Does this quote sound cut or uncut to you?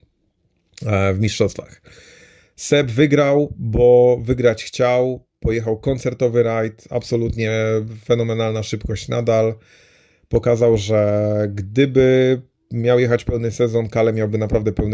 uncut